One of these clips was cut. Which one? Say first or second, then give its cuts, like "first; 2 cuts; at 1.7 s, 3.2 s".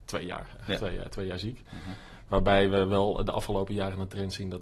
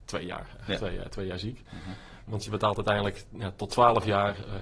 second; 1 cut; at 2.3 s